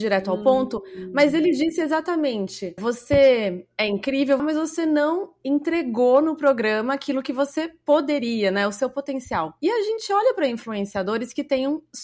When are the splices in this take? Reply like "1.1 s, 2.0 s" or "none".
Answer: 2.8 s, 4.4 s

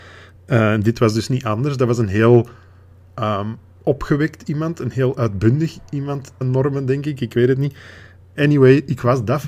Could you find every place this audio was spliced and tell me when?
6.4 s, 8.4 s

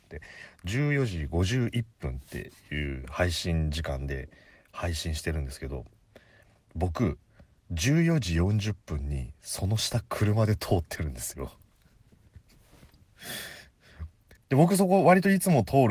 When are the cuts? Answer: 14.4 s

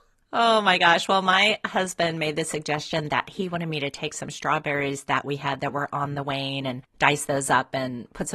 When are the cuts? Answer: 6.9 s

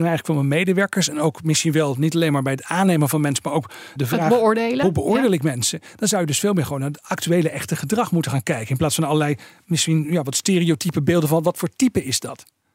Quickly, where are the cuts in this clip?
4.0 s

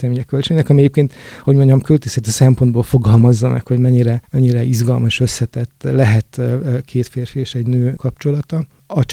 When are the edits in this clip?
none

